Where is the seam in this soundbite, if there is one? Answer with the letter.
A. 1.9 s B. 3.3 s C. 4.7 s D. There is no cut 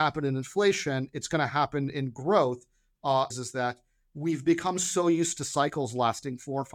B